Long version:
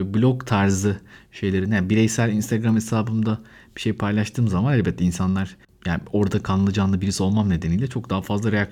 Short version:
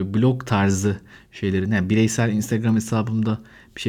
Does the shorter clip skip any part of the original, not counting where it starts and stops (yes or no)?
no